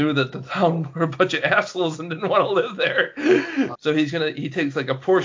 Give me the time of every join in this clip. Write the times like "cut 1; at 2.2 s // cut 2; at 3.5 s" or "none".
cut 1; at 3.7 s